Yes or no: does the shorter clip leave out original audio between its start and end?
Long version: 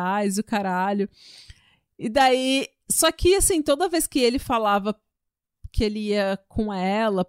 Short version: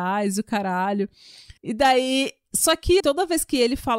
yes